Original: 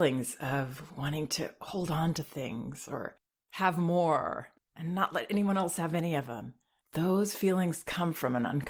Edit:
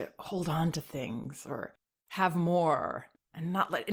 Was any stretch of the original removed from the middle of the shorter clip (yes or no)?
no